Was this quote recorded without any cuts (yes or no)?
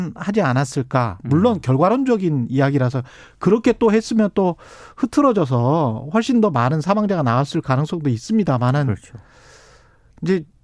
yes